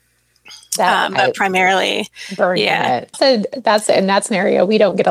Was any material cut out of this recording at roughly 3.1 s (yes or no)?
yes